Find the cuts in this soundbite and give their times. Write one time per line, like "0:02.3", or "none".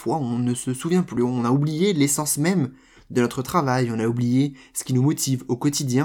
none